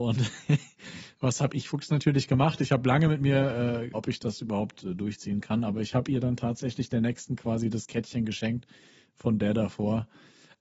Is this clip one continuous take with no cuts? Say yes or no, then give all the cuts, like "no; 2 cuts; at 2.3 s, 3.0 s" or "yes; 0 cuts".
no; 1 cut; at 3.9 s